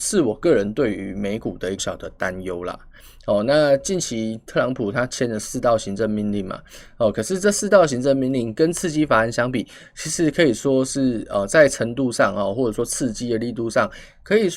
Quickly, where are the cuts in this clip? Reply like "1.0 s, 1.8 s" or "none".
1.8 s